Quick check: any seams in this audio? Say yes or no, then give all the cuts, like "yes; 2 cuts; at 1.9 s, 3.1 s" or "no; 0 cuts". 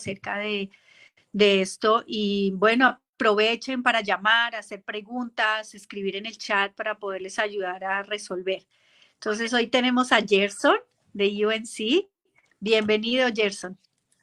no; 0 cuts